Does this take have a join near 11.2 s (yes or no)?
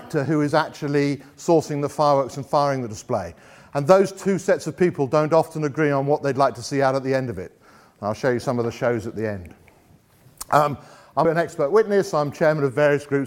yes